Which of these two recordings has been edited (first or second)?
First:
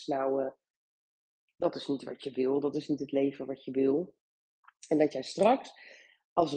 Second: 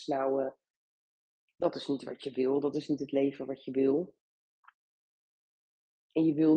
first